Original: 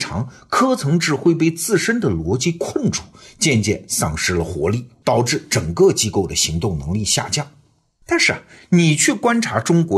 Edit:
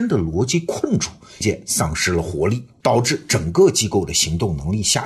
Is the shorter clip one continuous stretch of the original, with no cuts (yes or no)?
no